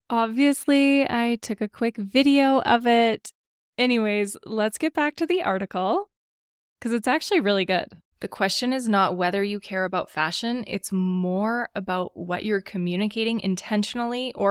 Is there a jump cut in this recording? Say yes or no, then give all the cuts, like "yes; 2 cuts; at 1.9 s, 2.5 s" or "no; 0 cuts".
yes; 1 cut; at 8.1 s